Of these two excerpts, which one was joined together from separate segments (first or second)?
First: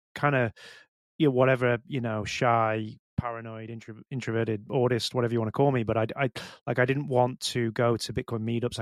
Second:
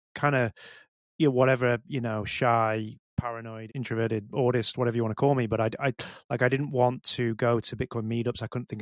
second